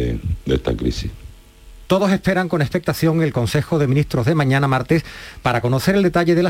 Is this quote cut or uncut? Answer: cut